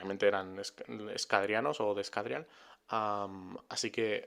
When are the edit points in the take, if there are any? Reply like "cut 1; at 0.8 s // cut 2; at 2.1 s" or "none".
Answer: none